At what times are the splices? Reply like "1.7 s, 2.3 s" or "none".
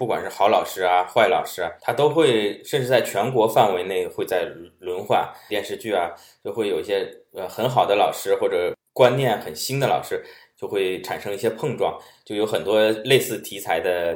1.8 s, 5.5 s, 10.5 s